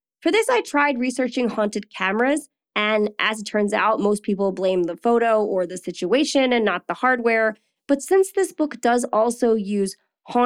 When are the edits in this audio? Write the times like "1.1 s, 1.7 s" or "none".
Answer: none